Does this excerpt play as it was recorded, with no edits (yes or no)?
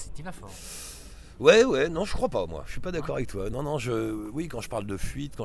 yes